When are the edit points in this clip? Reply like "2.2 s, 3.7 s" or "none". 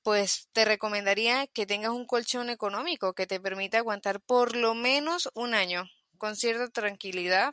none